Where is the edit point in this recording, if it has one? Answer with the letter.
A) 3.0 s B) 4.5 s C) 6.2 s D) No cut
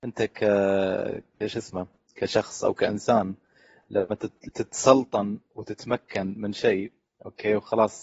B